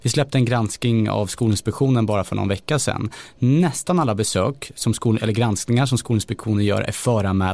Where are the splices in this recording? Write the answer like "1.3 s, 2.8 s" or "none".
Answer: none